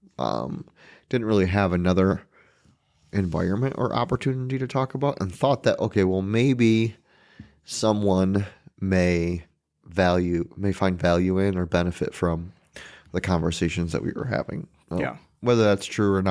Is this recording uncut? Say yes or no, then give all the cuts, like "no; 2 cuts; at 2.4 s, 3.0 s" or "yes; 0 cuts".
yes; 0 cuts